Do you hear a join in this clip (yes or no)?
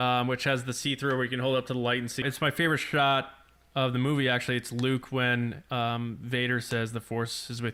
yes